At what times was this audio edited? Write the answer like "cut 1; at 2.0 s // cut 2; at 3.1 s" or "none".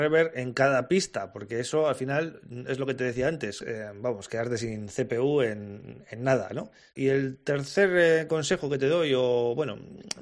cut 1; at 3.6 s